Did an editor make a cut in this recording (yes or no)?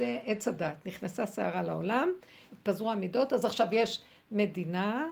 no